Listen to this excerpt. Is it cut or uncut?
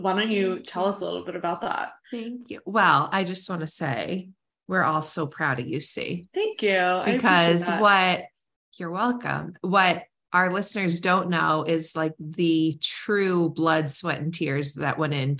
uncut